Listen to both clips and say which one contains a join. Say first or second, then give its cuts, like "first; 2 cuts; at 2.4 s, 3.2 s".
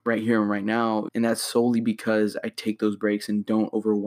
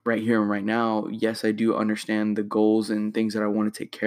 first; 1 cut; at 1.1 s